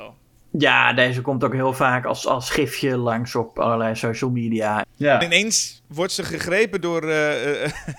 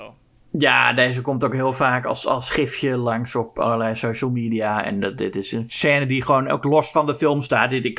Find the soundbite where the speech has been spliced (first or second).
first